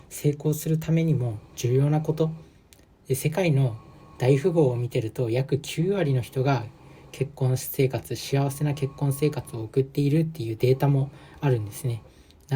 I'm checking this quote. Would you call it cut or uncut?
uncut